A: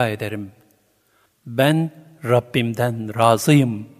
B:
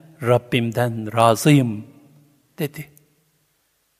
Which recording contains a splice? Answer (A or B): A